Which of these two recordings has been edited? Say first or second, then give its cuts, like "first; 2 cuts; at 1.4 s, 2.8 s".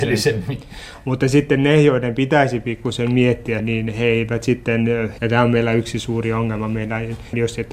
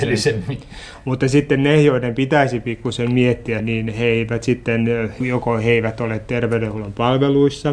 first; 1 cut; at 5.2 s